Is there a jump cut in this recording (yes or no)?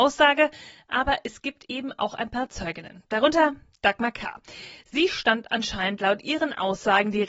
no